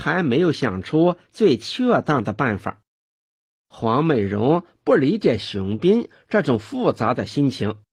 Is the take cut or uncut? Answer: uncut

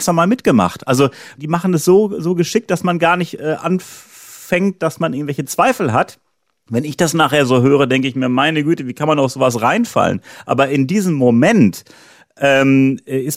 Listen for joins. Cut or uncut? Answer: uncut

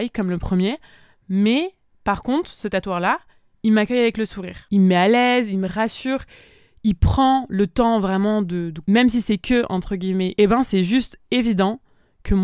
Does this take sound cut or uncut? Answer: cut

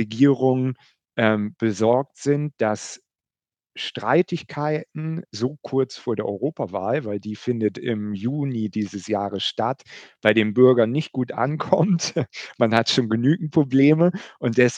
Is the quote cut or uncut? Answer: uncut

